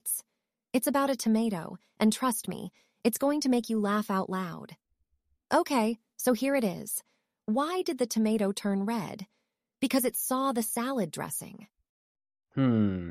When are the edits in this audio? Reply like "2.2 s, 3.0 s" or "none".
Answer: none